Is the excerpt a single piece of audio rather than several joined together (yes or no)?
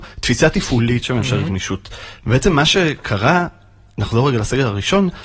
yes